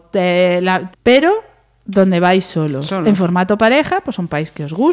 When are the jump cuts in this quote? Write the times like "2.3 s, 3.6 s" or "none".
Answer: 0.9 s